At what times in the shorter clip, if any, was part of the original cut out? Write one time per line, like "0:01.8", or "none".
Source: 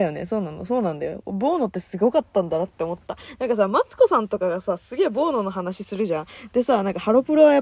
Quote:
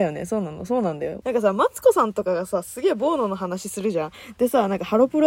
0:01.2